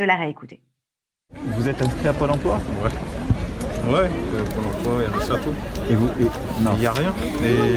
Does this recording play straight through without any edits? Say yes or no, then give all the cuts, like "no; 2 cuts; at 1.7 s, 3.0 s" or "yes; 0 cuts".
yes; 0 cuts